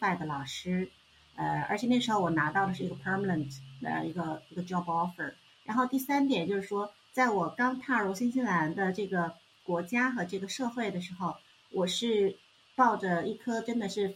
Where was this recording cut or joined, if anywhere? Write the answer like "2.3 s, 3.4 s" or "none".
5.5 s